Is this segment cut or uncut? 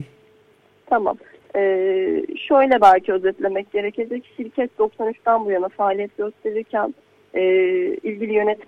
uncut